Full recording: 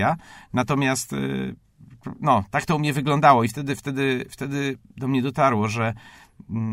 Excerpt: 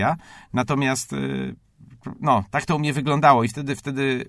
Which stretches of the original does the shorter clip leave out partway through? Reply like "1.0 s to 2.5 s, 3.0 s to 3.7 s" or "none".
none